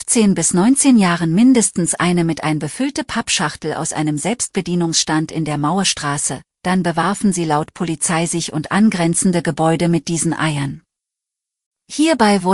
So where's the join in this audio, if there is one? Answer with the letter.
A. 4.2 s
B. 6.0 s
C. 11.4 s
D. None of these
D